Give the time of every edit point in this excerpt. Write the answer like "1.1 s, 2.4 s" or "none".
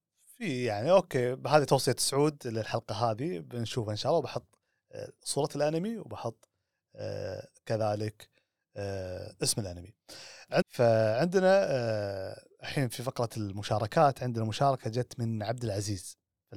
10.6 s